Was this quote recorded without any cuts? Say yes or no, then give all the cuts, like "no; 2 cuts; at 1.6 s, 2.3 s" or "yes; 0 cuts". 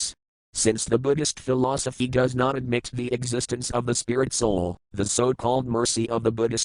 yes; 0 cuts